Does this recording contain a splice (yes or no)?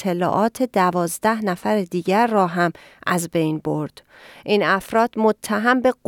no